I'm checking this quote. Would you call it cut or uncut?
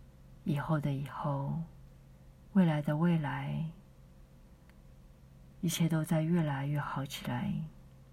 cut